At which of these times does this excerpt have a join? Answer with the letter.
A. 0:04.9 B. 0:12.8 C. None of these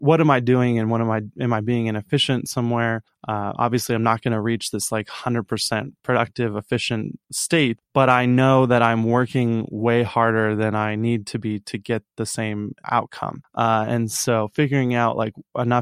B